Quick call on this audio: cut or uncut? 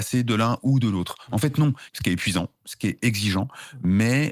cut